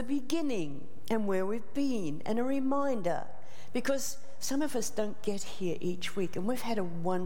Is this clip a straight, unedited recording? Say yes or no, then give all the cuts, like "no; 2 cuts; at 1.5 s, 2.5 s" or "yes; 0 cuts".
yes; 0 cuts